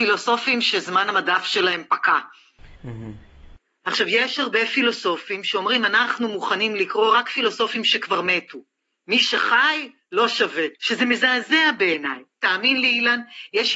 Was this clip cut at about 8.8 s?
no; 3 cuts; at 2.8 s, 10.8 s, 12.3 s

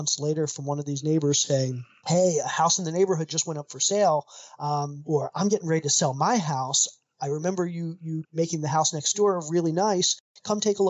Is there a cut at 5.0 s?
yes; 1 cut; at 5.0 s

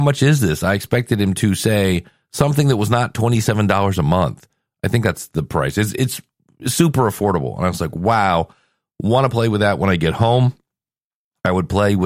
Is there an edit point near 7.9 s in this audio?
no; 0 cuts

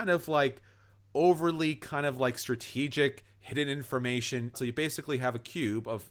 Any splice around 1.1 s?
no; 1 cut; at 4.5 s

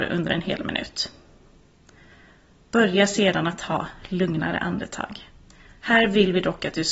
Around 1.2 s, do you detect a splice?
no; 1 cut; at 5.8 s

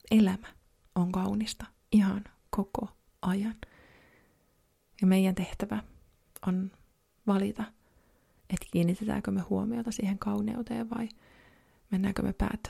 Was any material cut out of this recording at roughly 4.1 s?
no; 0 cuts

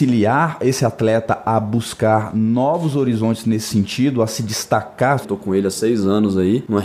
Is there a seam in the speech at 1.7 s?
no; 1 cut; at 5.2 s

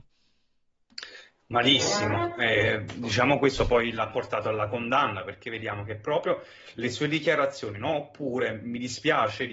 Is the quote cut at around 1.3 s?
no; 0 cuts

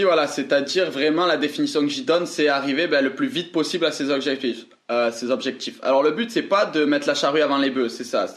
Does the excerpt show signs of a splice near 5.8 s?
no; 0 cuts

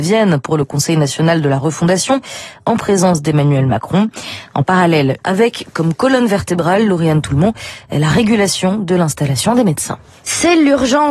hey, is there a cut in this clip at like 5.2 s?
yes; 1 cut; at 5.2 s

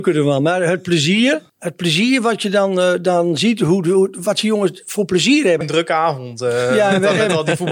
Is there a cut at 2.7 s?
no; 2 cuts; at 1.5 s, 5.6 s

